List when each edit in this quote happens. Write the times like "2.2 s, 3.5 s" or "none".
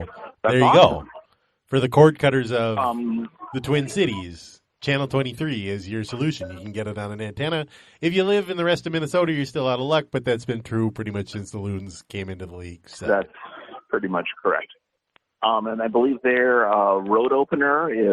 none